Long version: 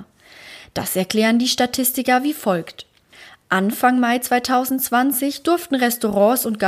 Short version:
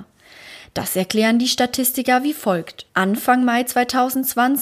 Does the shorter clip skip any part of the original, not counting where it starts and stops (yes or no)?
yes